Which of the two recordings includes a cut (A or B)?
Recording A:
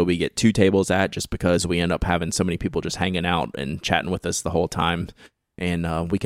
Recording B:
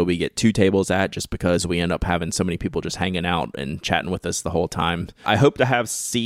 B